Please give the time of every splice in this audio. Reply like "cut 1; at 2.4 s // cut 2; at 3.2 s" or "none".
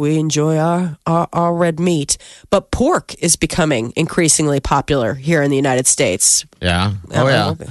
cut 1; at 6.5 s